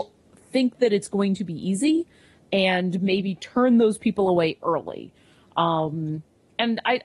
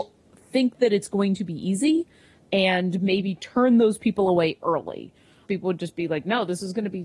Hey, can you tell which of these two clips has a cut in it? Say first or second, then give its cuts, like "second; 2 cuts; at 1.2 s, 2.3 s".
second; 1 cut; at 5.5 s